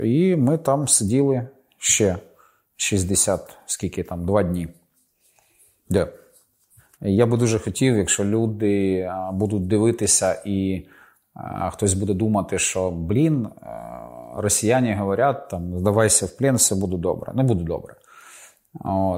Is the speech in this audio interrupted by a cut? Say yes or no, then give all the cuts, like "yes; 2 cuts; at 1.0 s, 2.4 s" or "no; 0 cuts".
no; 0 cuts